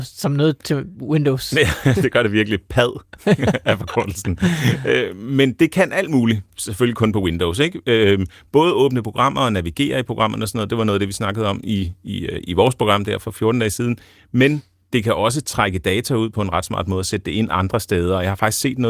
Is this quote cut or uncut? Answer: uncut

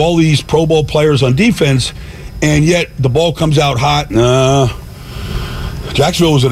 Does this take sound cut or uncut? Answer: cut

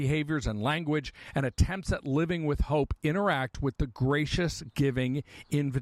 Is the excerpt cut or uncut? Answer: uncut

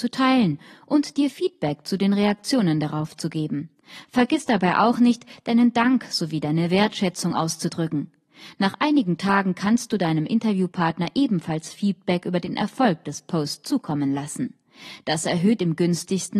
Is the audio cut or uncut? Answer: uncut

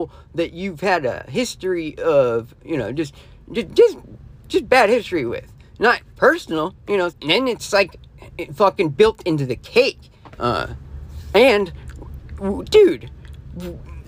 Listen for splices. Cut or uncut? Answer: cut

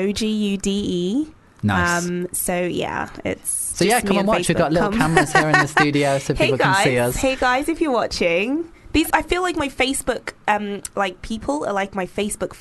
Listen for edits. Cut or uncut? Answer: cut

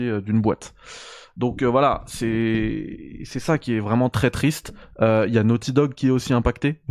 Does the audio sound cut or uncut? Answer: uncut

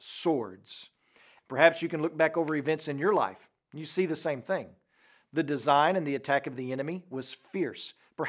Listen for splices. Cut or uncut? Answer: cut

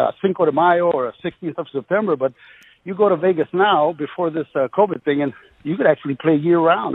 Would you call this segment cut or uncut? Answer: uncut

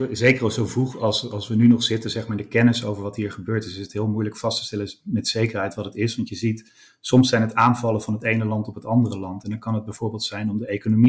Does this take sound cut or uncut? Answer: uncut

